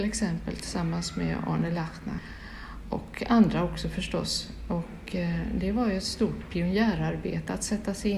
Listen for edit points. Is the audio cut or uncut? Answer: uncut